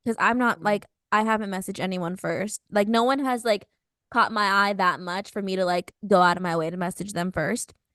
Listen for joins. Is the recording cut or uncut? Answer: uncut